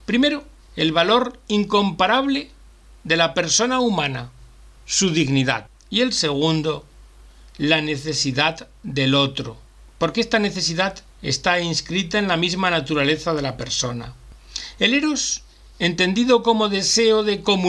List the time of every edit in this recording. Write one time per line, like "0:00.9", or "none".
0:11.1

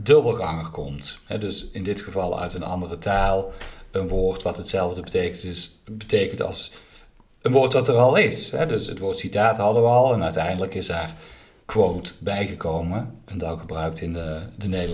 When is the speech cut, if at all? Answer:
none

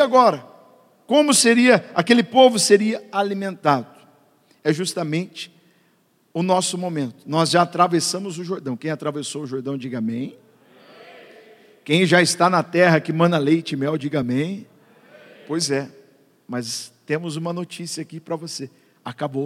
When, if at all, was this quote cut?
none

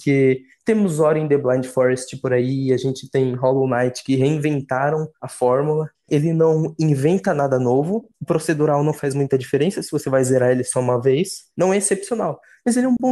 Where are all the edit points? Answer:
0:06.1
0:11.5

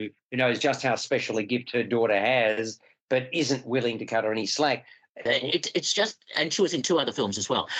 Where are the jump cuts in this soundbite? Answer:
0:05.3

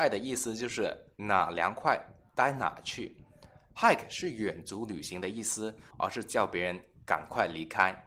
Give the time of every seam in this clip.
0:05.9

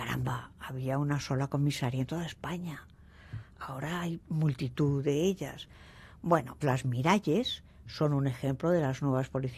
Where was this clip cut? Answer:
0:06.6

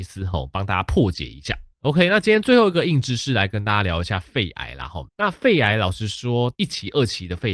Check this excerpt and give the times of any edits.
0:01.7
0:05.1
0:06.5

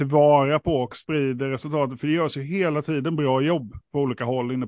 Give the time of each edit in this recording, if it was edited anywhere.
0:02.0

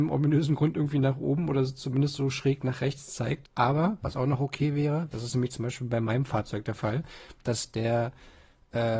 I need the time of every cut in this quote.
0:03.4
0:05.1

